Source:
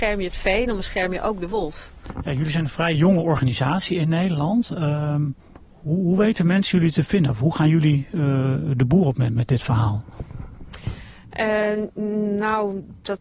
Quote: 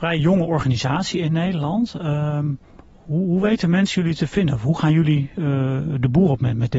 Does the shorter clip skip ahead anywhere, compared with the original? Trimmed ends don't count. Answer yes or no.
no